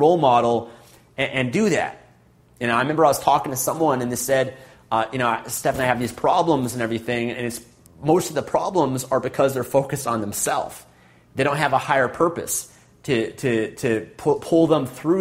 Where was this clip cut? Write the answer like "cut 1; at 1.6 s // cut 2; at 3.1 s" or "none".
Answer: none